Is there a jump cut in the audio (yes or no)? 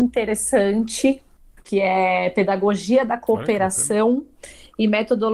no